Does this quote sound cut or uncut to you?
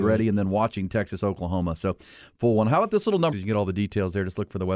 cut